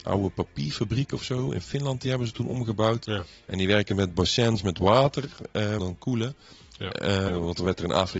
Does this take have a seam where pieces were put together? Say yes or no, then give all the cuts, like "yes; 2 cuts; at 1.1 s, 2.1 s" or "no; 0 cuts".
yes; 2 cuts; at 5.8 s, 7.3 s